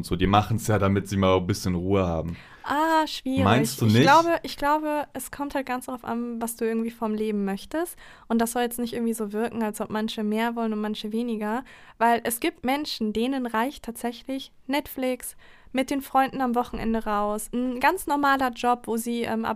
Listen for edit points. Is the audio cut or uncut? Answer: uncut